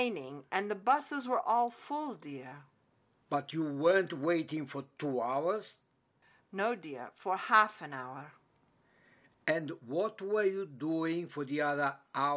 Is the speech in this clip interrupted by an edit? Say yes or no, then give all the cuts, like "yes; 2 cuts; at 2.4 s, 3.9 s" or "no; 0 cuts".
no; 0 cuts